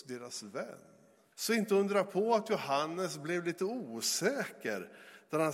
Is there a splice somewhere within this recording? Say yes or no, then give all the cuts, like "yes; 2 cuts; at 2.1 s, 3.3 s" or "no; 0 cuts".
yes; 1 cut; at 1.3 s